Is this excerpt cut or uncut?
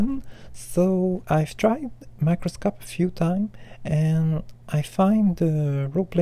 uncut